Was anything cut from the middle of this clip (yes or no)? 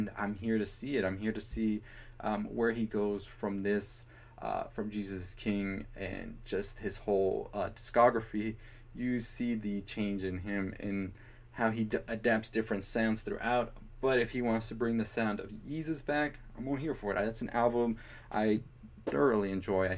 no